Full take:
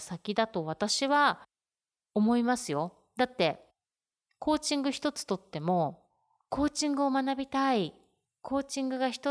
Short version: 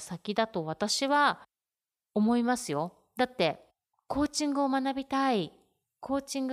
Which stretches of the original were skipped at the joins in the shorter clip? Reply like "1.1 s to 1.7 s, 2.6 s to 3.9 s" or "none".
3.9 s to 6.3 s